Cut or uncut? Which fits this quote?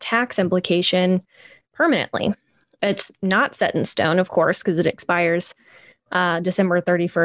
uncut